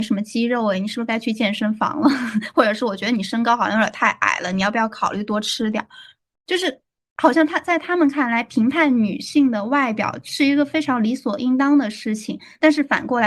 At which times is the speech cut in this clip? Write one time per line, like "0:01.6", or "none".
none